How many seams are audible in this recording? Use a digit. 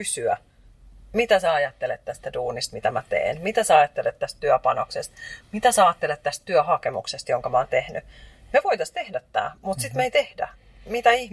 0